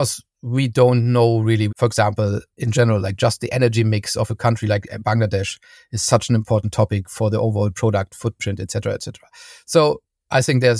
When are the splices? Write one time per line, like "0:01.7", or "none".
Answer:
0:01.7